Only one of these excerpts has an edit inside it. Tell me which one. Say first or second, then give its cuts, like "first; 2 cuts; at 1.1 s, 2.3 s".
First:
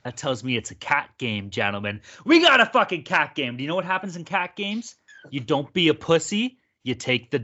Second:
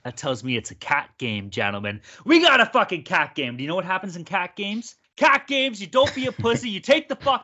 second; 1 cut; at 5.0 s